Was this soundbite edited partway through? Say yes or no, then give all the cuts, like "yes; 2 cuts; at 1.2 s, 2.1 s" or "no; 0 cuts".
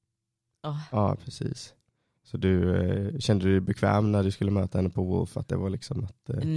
yes; 1 cut; at 0.9 s